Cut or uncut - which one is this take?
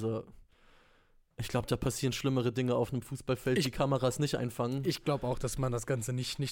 uncut